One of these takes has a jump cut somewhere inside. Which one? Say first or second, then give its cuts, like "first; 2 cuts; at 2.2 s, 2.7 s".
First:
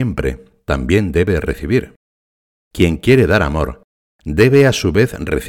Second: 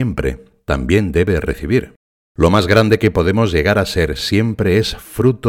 second; 1 cut; at 2.3 s